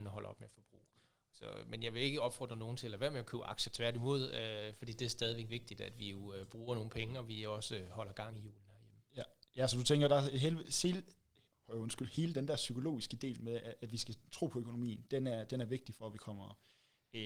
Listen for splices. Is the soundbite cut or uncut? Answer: uncut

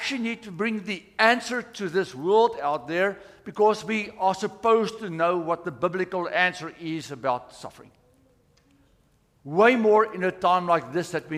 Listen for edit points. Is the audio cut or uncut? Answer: uncut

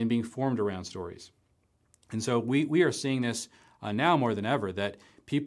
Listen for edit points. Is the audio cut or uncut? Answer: uncut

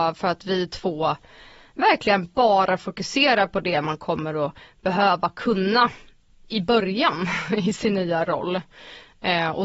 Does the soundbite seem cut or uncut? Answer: uncut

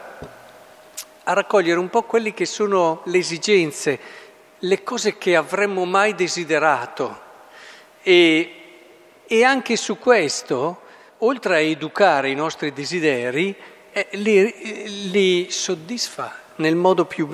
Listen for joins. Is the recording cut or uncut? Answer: uncut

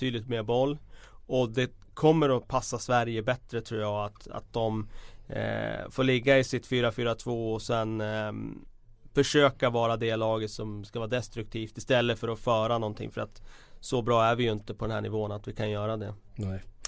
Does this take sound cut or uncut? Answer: uncut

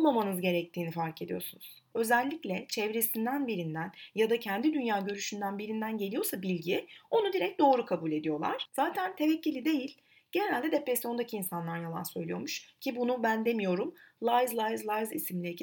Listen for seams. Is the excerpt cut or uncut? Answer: cut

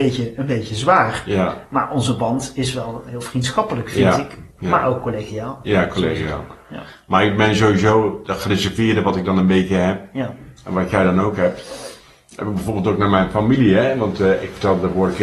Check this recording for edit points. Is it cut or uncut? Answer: uncut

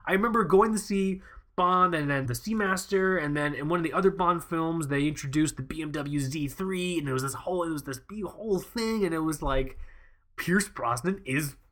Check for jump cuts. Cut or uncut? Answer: cut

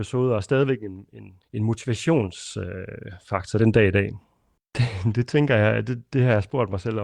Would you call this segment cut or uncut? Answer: cut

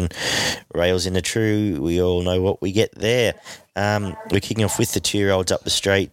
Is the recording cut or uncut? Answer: uncut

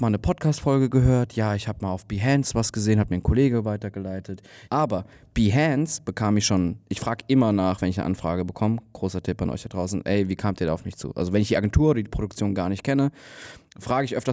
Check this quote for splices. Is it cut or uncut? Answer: cut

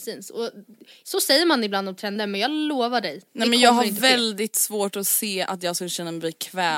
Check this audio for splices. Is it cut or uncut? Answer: cut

